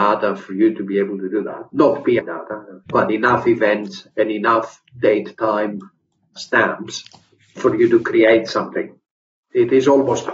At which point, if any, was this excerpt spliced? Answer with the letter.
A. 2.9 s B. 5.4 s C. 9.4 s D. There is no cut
A